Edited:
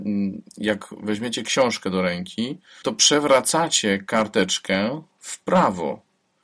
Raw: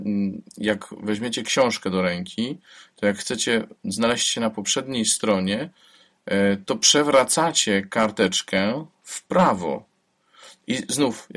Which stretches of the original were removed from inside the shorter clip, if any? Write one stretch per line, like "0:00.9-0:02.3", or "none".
0:02.8-0:06.7